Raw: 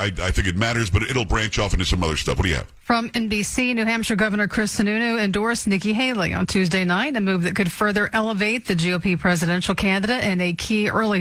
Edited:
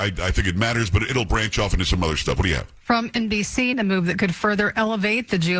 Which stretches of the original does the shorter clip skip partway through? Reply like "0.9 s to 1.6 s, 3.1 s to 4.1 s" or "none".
3.7 s to 7.1 s